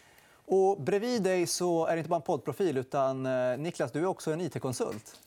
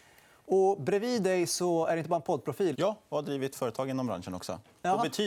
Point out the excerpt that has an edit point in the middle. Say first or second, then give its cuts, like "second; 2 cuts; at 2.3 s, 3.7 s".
second; 1 cut; at 2.7 s